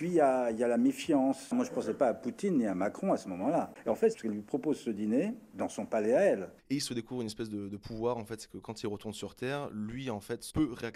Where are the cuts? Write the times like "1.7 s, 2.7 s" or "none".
4.1 s, 6.6 s